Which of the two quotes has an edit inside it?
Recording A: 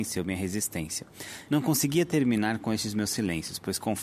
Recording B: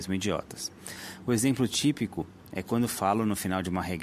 A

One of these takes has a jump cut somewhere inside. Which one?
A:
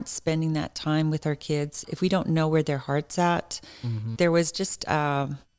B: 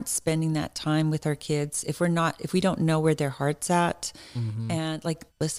A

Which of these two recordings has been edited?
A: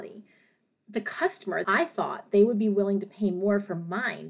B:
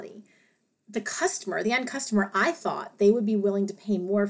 A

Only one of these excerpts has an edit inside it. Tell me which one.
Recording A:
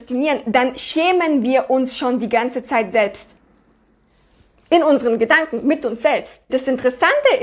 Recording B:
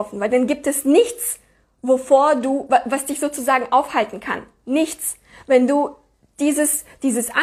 A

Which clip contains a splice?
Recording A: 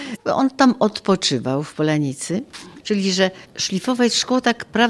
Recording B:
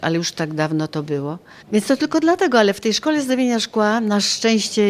A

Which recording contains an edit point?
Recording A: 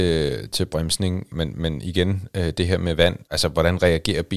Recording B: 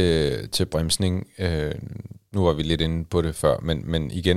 A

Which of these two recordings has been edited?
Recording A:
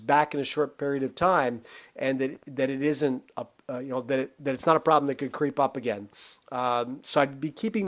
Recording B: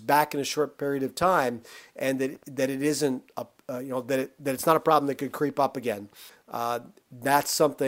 B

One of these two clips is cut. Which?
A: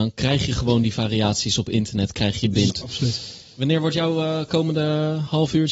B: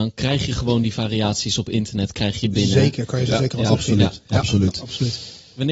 A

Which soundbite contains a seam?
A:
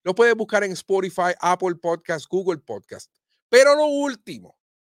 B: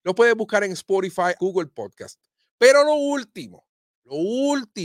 B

